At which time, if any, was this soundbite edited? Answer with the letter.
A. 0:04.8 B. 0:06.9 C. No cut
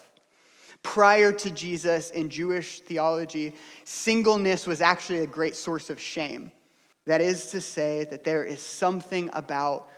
B